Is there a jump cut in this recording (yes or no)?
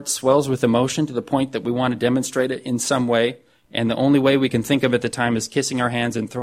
no